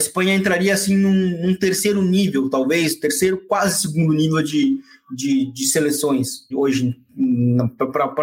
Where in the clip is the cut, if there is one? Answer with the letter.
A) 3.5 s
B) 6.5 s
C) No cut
B